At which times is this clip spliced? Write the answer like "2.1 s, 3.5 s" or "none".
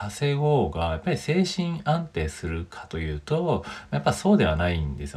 none